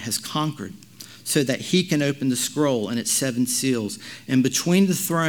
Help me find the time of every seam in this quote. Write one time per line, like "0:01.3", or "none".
none